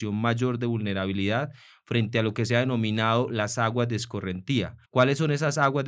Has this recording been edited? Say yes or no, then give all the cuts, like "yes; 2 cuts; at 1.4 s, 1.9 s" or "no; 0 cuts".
yes; 1 cut; at 4.9 s